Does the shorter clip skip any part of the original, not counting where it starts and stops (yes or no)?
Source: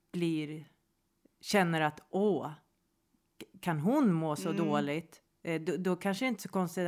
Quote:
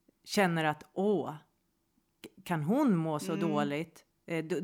no